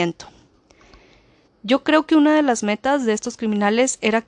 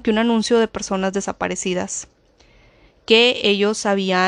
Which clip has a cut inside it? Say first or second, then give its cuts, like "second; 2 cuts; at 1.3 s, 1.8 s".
first; 1 cut; at 1.5 s